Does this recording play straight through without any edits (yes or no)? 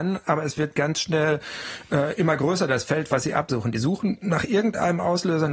yes